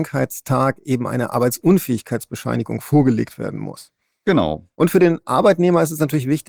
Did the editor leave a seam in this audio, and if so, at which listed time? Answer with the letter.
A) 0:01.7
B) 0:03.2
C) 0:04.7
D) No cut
C